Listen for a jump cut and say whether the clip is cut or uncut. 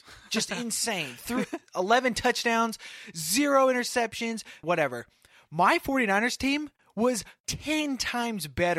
cut